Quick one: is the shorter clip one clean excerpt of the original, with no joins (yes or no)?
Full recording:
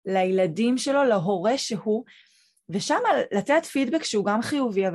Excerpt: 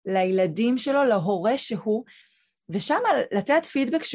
yes